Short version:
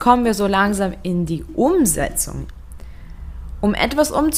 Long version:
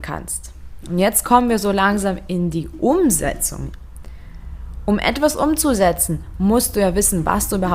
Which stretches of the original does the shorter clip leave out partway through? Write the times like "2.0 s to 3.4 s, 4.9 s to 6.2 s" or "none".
none